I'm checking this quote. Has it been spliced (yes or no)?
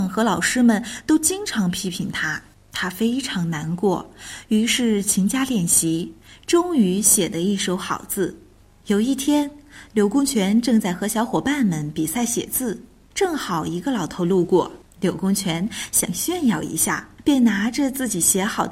no